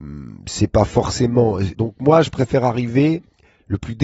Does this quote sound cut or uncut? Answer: cut